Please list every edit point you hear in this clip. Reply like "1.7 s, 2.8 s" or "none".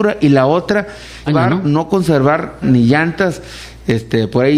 1.3 s, 2.6 s